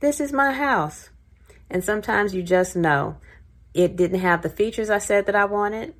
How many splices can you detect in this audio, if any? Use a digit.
0